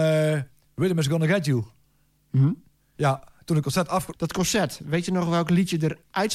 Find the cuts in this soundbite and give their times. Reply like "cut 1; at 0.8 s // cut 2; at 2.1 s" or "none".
cut 1; at 3.0 s // cut 2; at 4.1 s